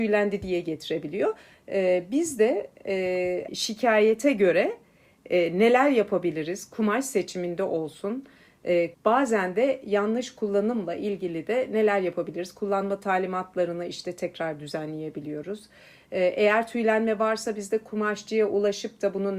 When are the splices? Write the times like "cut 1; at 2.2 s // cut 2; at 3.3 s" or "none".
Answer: cut 1; at 3.5 s // cut 2; at 8.9 s